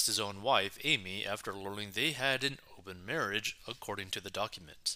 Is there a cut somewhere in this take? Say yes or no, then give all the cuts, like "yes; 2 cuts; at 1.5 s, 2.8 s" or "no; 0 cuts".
no; 0 cuts